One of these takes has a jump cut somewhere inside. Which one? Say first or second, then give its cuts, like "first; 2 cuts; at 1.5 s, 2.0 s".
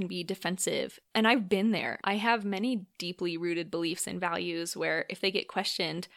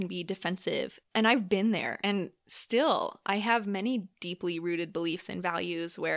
first; 1 cut; at 2.0 s